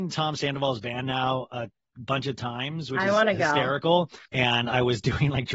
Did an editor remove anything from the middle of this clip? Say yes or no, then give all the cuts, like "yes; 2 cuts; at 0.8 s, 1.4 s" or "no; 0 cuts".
yes; 1 cut; at 4.3 s